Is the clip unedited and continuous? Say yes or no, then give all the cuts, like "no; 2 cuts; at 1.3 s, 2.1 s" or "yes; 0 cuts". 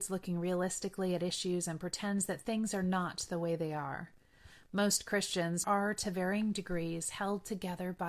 no; 1 cut; at 5.6 s